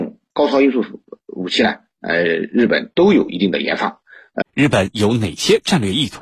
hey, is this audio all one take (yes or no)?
no